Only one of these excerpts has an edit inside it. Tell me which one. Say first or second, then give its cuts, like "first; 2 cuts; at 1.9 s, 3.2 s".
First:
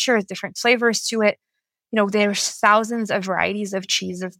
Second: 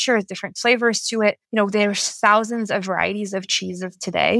second; 1 cut; at 1.4 s